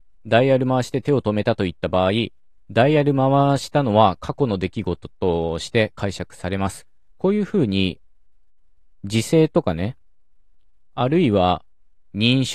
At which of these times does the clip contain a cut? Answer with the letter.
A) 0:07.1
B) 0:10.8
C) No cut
A